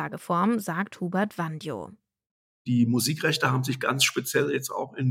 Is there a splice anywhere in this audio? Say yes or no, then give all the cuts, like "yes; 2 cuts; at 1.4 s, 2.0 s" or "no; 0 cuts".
no; 0 cuts